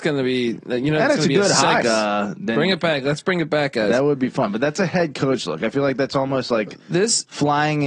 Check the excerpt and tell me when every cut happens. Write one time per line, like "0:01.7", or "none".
0:01.8